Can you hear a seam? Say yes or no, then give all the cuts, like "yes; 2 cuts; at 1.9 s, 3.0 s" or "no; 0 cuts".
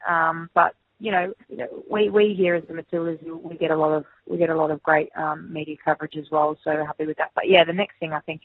yes; 1 cut; at 1.4 s